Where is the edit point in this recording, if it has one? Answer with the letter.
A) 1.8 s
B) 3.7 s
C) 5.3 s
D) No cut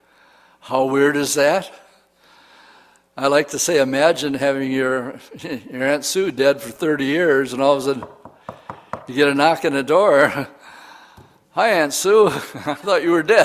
D